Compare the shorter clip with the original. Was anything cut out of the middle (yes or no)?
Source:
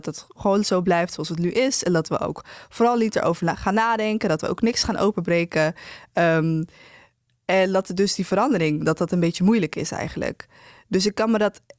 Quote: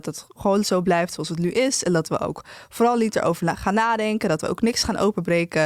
no